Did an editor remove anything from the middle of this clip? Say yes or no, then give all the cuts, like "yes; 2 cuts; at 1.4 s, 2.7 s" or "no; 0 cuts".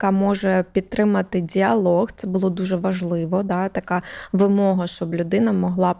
no; 0 cuts